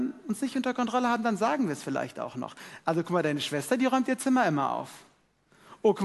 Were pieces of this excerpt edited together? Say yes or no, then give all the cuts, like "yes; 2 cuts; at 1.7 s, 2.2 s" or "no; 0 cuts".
no; 0 cuts